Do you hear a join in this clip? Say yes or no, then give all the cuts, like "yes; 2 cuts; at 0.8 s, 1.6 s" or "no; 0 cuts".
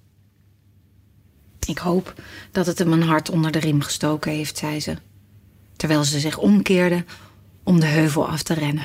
no; 0 cuts